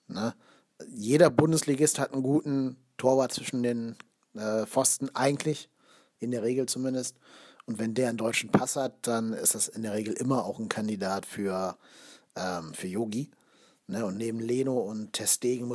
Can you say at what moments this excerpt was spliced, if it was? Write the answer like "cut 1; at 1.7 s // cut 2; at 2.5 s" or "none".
none